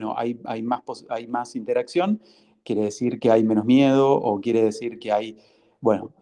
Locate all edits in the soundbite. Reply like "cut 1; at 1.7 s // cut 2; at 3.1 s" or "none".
none